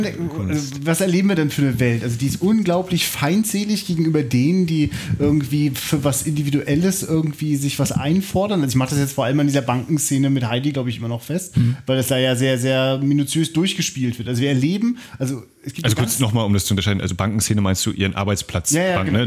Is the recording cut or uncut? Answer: uncut